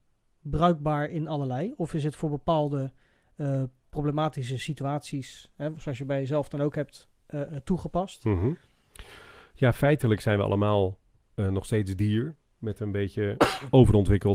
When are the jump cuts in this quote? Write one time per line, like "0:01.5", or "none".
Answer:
none